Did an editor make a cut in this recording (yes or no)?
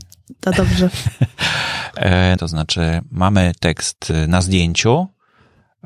yes